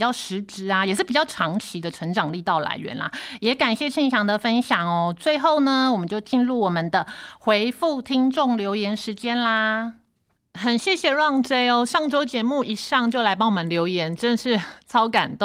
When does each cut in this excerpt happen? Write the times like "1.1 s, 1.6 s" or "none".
none